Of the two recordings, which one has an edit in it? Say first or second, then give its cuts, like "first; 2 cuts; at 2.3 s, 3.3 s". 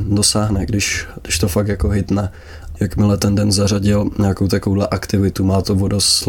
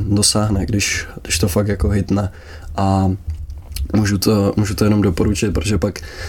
first; 1 cut; at 2.8 s